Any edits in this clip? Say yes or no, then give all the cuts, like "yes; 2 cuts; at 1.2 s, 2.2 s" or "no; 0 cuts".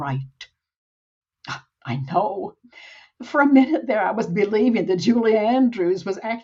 no; 0 cuts